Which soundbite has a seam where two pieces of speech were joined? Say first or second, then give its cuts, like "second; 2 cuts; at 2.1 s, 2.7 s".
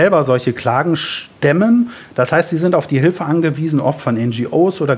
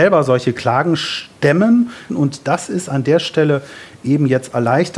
second; 1 cut; at 2.1 s